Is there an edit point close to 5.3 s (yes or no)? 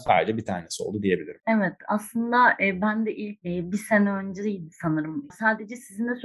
yes